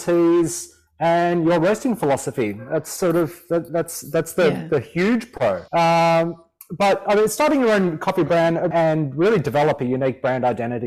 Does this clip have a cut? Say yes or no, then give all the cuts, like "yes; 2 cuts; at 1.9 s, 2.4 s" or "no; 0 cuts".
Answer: yes; 2 cuts; at 5.7 s, 8.7 s